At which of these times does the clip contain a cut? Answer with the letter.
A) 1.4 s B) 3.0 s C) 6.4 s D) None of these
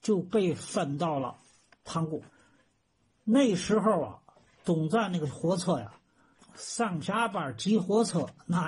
C